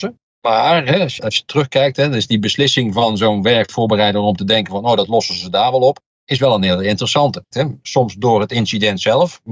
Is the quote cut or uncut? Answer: cut